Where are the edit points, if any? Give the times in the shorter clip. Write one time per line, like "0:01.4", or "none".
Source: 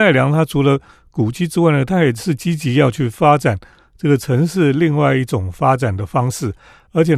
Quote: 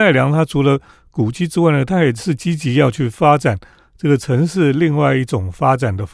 none